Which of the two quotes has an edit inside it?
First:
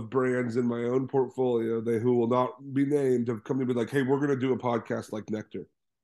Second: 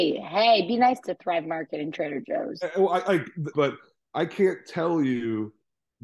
second; 1 cut; at 3.5 s

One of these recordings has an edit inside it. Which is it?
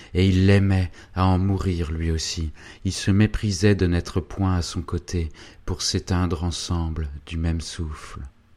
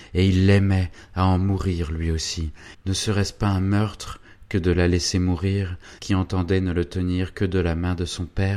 second; 2 cuts; at 2.7 s, 6.0 s

